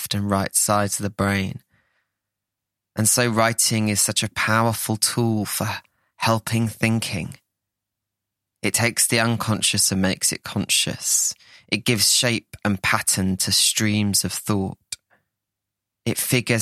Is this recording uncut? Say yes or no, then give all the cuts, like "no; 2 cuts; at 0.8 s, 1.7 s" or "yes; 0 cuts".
yes; 0 cuts